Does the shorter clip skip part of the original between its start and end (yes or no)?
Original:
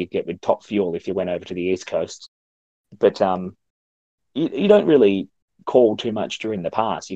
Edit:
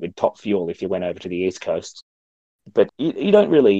yes